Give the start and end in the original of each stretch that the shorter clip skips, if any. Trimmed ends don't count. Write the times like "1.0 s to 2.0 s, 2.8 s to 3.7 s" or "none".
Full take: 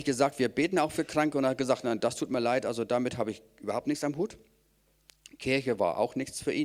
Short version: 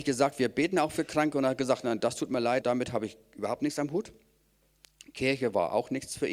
2.6 s to 2.9 s